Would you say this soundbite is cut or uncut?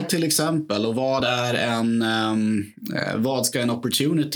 uncut